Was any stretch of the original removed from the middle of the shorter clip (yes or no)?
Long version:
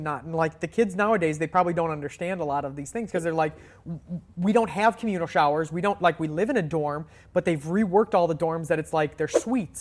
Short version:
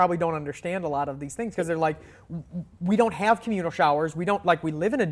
no